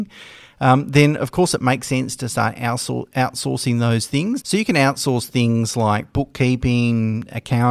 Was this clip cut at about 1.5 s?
no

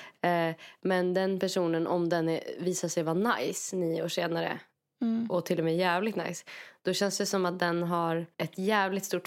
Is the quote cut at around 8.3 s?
yes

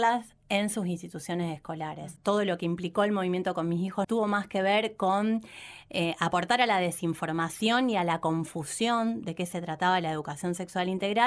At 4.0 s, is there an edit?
yes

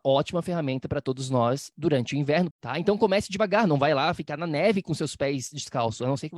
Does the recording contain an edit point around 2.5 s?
yes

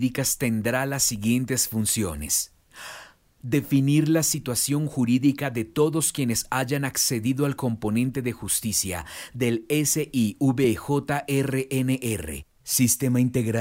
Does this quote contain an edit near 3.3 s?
yes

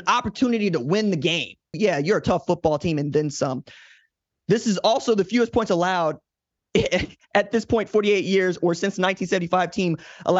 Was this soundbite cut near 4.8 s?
no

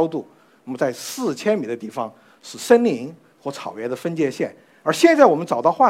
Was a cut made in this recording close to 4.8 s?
no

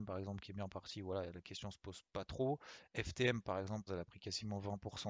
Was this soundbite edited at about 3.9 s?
yes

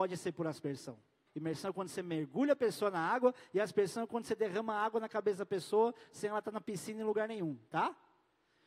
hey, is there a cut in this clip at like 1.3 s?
yes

